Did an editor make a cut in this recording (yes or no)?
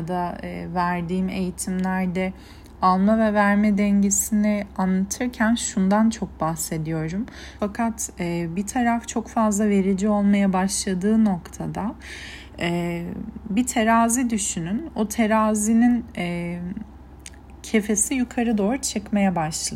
yes